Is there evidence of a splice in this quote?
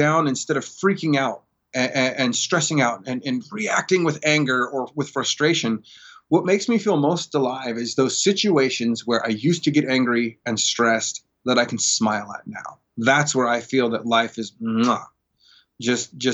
no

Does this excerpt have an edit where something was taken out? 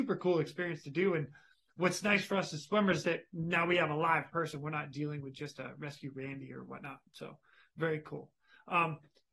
no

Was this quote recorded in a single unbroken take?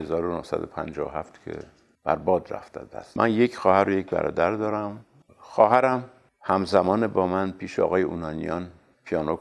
no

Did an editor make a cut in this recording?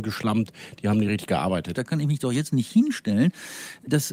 yes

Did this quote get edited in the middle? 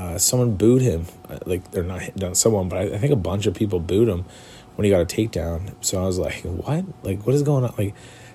no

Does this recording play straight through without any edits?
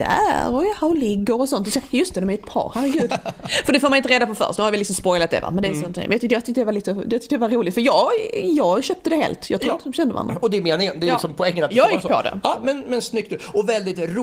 yes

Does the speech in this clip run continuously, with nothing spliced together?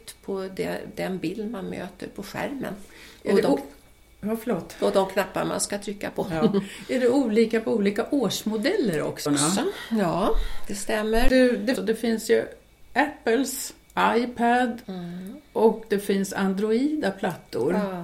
no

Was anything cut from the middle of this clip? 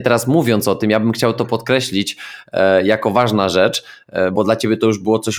yes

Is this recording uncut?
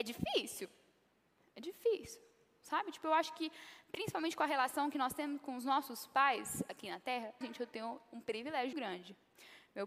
no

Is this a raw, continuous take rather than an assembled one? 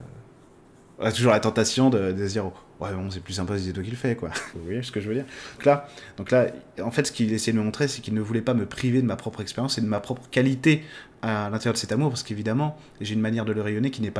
no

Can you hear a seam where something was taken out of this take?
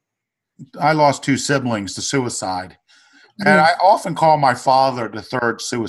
no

